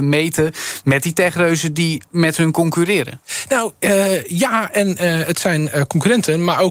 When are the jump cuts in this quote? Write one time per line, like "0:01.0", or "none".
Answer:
none